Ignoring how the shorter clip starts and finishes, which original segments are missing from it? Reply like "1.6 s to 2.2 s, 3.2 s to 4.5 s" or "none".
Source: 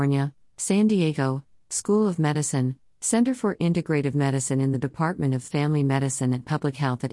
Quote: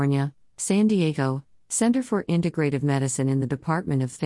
1.6 s to 2.9 s